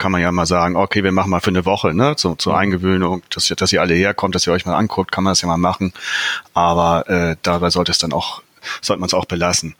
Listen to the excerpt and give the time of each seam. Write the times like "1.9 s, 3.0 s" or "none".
none